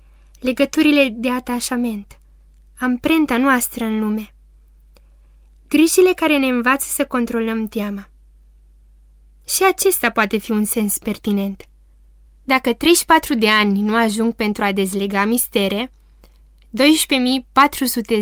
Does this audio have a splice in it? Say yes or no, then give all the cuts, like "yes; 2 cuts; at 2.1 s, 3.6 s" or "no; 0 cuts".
yes; 1 cut; at 12.2 s